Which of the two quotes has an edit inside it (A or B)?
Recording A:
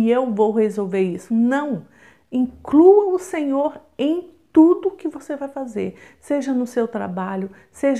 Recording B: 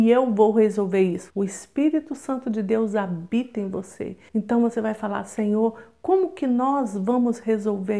B